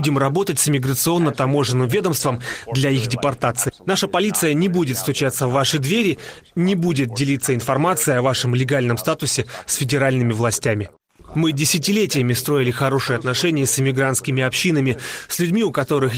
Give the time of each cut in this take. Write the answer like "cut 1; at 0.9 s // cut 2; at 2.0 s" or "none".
cut 1; at 3.8 s // cut 2; at 11.3 s